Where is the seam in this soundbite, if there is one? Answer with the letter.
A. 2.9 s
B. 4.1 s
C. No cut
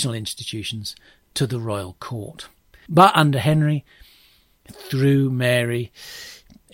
A